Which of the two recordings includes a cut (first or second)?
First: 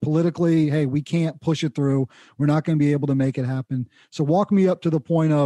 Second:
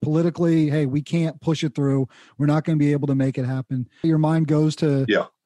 second